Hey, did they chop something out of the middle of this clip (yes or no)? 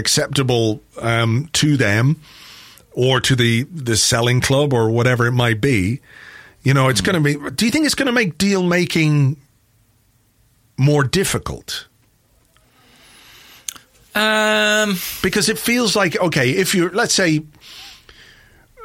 no